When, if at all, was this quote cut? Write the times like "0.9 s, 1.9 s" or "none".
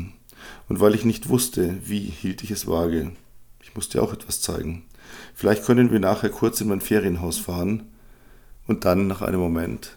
none

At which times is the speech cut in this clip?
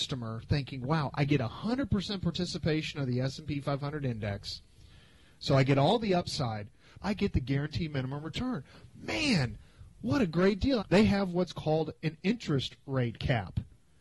7.0 s, 10.8 s

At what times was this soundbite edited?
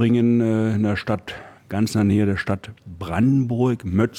1.6 s

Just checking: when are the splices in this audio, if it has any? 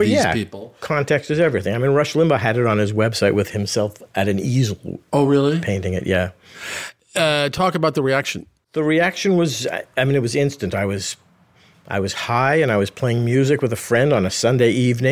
none

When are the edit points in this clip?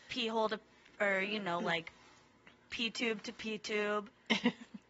none

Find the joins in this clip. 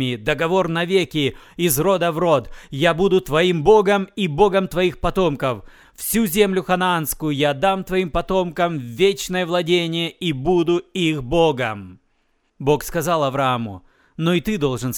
5.8 s

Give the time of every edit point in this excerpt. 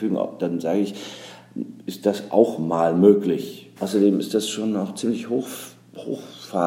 3.8 s

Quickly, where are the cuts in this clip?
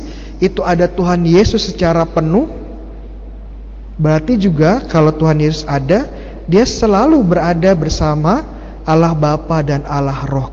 none

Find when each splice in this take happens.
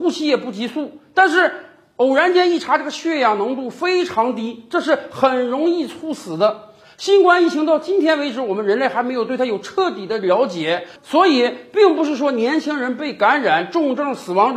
none

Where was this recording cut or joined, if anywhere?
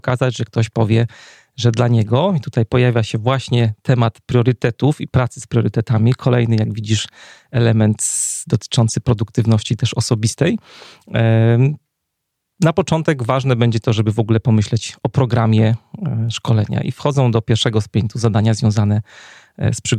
none

